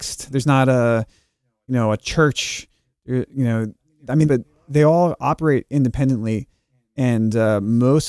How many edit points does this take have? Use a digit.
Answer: 1